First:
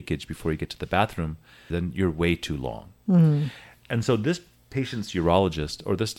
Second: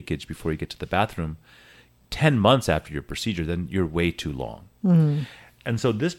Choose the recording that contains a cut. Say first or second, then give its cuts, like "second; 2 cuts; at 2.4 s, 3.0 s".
first; 1 cut; at 1.7 s